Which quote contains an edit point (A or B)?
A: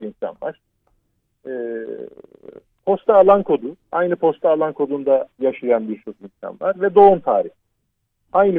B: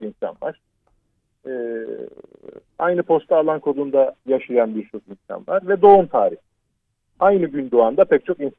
B